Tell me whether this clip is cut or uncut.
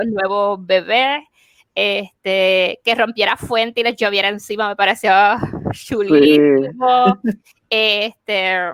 uncut